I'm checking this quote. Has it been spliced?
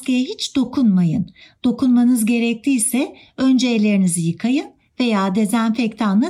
no; 0 cuts

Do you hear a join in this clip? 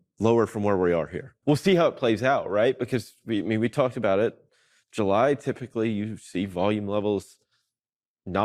yes; 1 cut; at 1.4 s

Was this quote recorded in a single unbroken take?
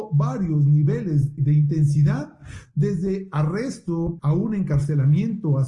no; 2 cuts; at 1.4 s, 4.2 s

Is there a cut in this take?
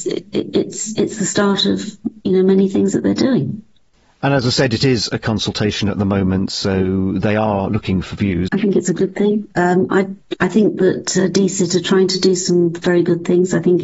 yes; 1 cut; at 8.5 s

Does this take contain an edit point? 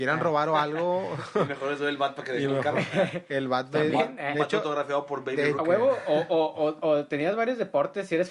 yes; 1 cut; at 5.5 s

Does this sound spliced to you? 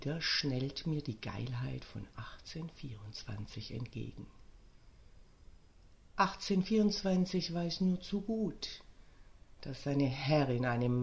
no; 0 cuts

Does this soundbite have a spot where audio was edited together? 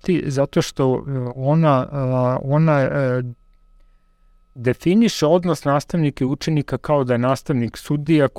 no; 0 cuts

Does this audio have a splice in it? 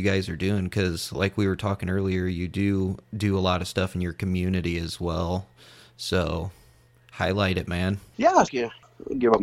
yes; 1 cut; at 8.5 s

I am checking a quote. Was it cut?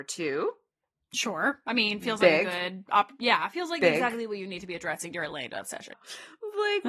yes; 1 cut; at 5.9 s

